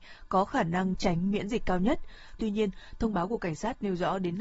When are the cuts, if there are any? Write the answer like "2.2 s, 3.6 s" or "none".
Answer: 0.9 s, 2.4 s